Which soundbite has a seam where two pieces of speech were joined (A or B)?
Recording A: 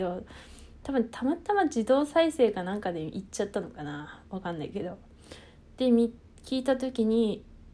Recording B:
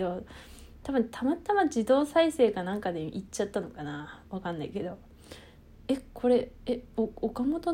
B